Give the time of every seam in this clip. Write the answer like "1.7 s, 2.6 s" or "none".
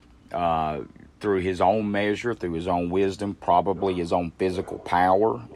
none